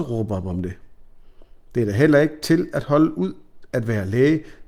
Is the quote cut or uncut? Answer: uncut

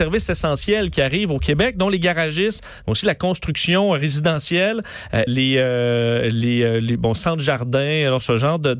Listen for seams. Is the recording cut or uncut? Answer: cut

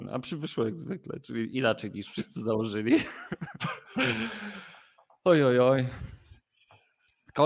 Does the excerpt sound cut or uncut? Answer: uncut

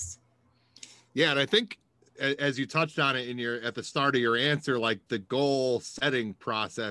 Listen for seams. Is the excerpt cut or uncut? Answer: uncut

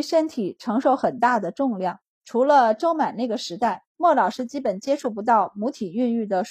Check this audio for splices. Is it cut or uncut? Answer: cut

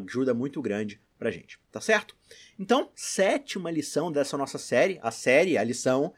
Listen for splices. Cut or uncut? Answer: uncut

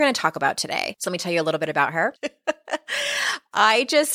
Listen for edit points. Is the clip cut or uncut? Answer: cut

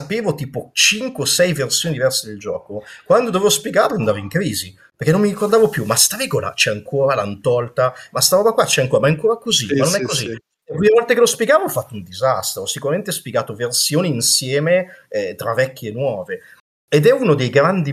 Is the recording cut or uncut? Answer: uncut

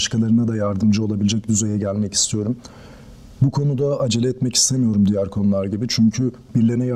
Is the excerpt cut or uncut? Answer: uncut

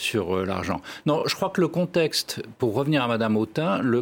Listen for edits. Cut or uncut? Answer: uncut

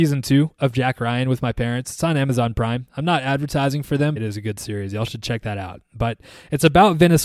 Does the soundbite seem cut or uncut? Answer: cut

